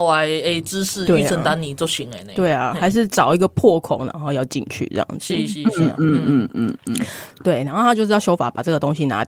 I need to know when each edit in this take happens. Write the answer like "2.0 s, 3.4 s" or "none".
none